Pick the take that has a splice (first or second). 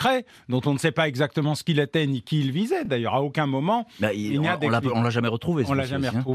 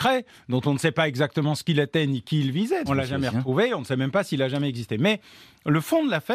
second